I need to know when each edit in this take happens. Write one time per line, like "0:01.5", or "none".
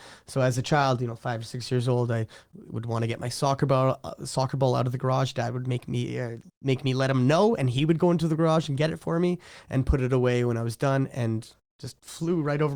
0:06.5

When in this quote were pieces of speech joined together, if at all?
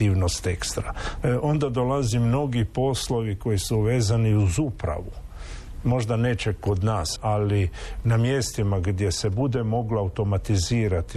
0:01.2
0:07.2

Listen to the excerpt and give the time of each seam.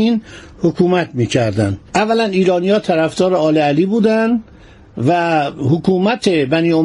0:01.9

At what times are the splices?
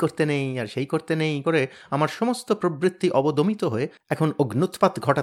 0:01.4

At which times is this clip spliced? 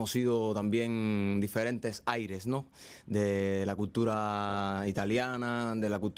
none

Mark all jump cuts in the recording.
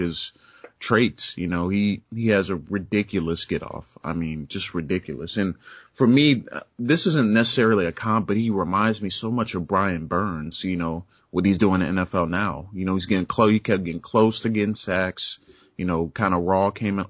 none

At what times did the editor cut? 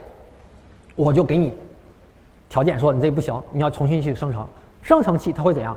0:04.7

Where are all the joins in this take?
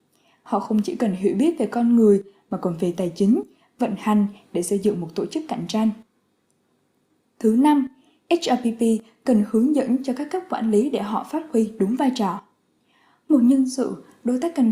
none

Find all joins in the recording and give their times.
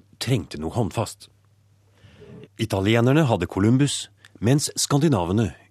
0:02.5

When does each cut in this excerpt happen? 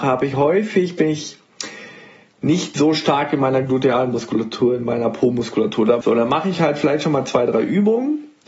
0:06.0

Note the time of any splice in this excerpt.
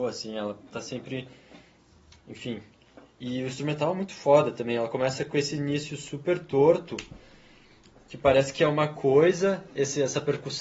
none

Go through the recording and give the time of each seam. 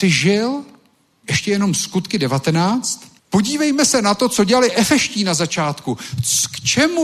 0:01.2
0:03.2

